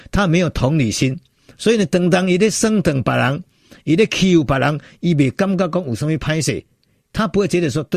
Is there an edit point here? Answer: no; 0 cuts

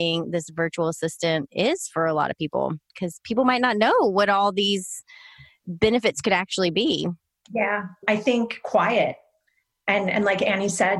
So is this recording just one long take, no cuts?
yes; 0 cuts

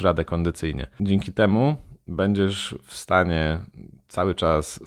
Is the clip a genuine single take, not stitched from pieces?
no; 1 cut; at 0.9 s

